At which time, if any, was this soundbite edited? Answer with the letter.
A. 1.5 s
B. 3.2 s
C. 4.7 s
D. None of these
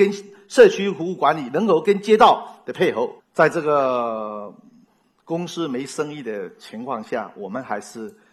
B